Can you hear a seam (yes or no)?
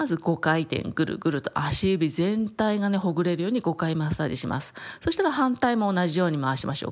no